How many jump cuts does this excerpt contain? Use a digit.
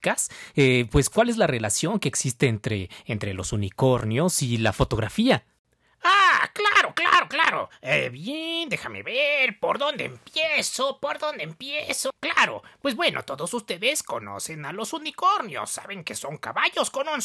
1